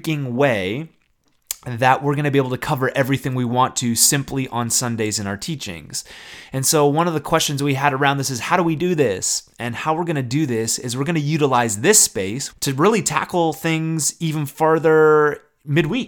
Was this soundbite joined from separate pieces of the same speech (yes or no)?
yes